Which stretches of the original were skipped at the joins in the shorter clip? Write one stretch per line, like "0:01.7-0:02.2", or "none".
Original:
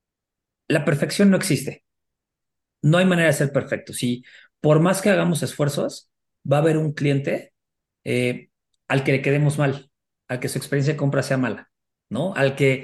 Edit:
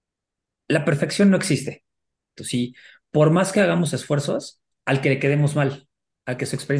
0:02.4-0:03.9
0:06.2-0:08.7